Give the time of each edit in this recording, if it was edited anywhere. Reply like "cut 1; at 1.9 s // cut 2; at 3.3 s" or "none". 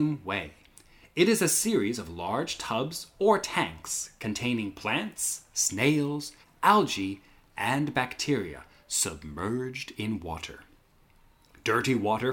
cut 1; at 6.4 s